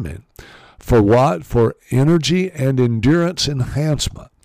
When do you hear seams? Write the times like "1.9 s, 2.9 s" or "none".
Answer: none